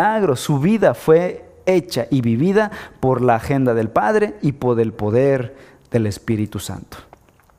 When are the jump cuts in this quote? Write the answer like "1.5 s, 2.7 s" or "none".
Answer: 4.9 s